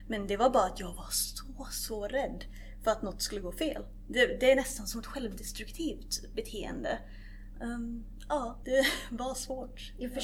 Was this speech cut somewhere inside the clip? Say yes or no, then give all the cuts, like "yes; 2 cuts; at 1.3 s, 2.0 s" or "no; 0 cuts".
yes; 2 cuts; at 7.6 s, 8.6 s